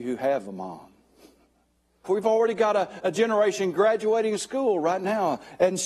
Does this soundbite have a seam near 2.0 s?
yes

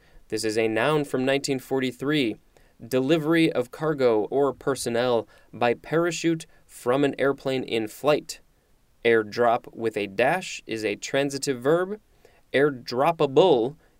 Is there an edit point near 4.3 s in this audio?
yes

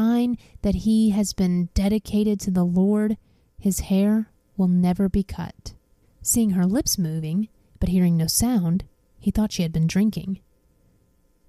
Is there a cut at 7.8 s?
no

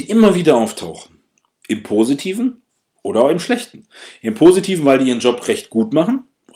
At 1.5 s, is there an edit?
no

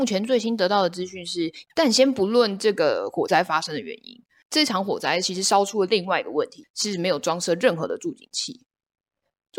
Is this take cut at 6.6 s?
yes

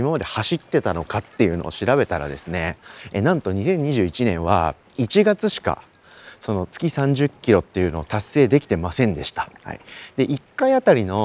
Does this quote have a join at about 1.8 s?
no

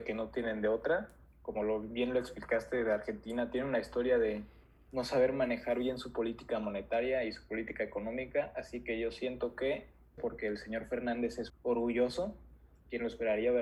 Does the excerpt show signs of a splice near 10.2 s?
yes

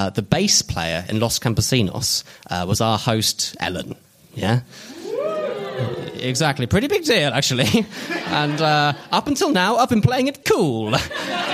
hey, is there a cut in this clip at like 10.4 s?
yes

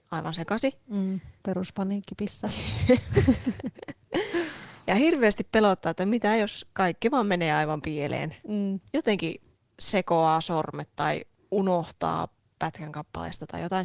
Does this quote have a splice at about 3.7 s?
no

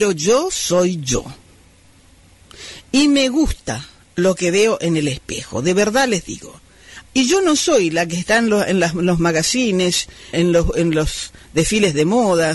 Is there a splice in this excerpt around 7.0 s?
yes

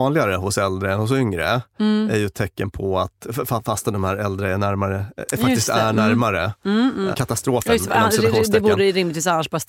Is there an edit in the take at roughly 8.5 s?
no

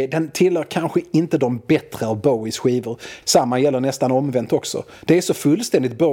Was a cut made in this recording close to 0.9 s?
no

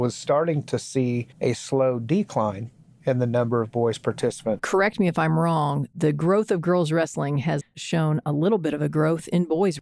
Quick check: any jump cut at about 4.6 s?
yes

